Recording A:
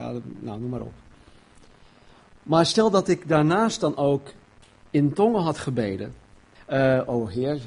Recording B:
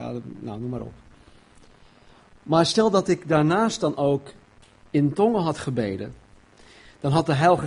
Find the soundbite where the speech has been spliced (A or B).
A